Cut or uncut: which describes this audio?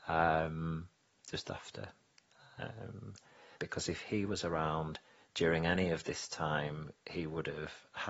cut